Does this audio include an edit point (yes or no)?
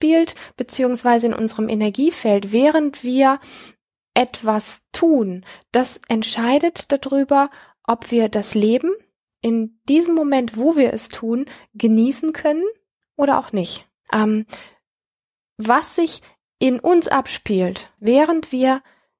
yes